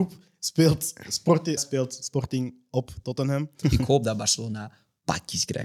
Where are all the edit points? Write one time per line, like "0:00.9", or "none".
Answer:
0:01.6
0:03.6